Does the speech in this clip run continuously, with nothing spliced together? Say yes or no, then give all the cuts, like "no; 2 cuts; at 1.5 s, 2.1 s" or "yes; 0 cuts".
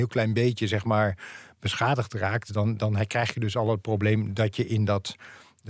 yes; 0 cuts